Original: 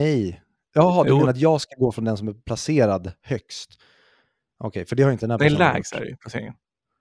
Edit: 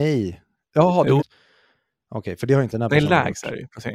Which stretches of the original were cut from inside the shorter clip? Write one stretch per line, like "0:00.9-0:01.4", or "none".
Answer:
0:01.2-0:03.7

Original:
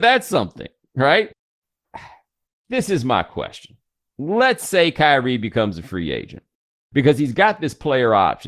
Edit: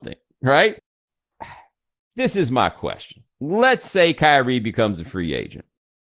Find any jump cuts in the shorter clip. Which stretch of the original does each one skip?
0:03.8-0:04.1

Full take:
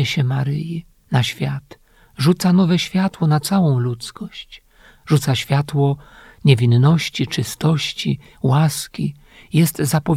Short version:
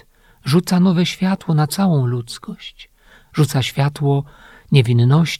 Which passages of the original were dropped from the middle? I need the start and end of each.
none

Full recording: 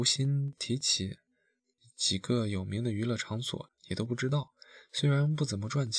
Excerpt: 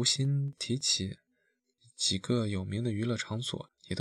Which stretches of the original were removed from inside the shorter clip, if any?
none

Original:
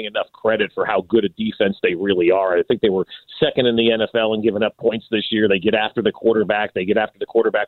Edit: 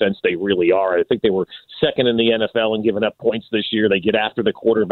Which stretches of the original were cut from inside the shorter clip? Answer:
none

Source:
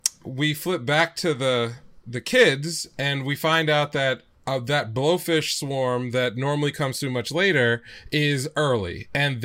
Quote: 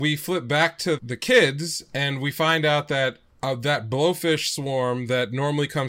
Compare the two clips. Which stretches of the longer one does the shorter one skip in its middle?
0:01.3-0:02.0

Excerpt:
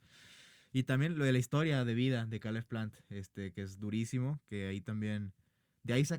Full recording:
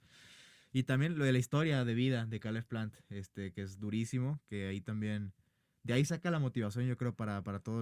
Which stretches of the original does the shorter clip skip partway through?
none

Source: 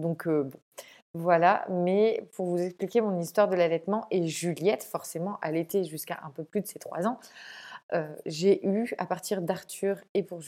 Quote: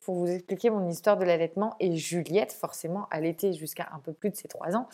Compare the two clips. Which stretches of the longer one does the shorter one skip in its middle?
none

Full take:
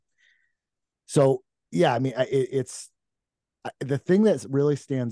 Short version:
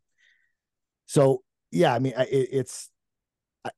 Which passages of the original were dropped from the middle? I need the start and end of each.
none

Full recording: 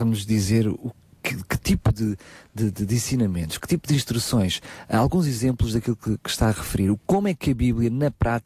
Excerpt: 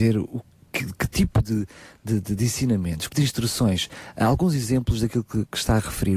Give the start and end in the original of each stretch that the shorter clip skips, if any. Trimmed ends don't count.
0:03.6-0:03.8

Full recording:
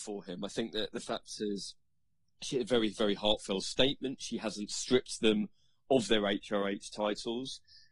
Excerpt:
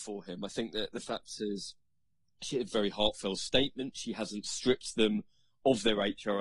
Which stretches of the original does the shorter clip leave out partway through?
0:02.7-0:02.9

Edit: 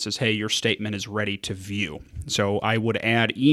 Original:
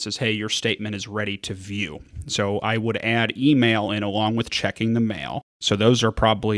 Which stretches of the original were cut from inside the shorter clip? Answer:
none

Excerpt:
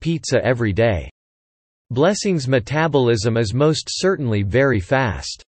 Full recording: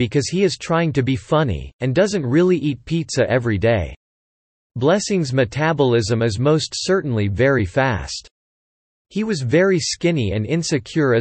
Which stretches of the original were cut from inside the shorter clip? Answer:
none

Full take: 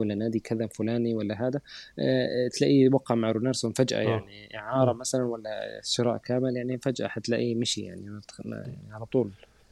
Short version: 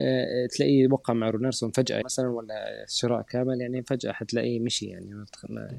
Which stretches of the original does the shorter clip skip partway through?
0:04.0-0:05.0

